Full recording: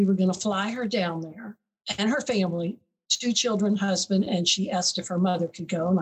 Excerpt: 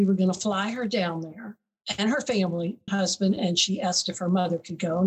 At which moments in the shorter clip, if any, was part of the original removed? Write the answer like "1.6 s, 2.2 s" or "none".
2.9 s